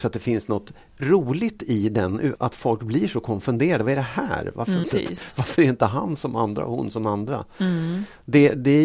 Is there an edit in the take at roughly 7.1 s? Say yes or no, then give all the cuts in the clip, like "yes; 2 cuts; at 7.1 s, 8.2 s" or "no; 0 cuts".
no; 2 cuts; at 2.4 s, 4.8 s